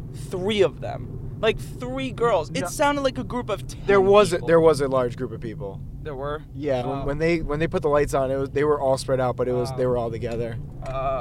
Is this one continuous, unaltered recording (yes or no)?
no